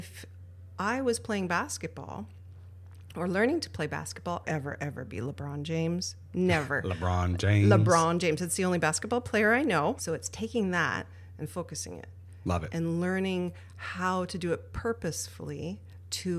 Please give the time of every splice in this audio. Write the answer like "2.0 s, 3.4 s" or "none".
4.4 s, 10.0 s, 12.7 s